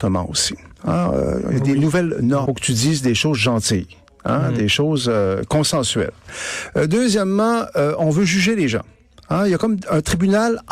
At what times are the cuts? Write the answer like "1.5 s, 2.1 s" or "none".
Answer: 2.5 s